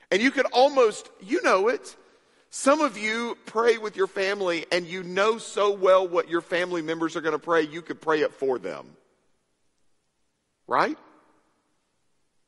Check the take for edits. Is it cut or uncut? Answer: uncut